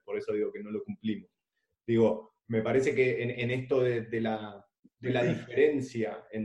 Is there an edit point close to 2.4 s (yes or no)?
no